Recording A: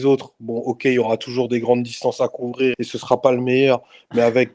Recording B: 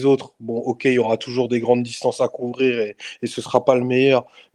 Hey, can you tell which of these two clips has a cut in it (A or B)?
A